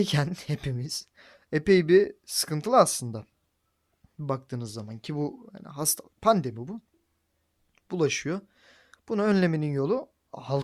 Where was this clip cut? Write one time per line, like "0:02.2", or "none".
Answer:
none